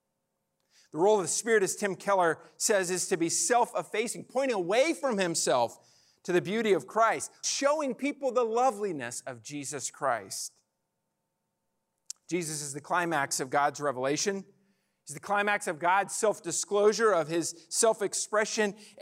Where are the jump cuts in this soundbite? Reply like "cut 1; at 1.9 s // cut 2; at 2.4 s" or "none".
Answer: cut 1; at 7.4 s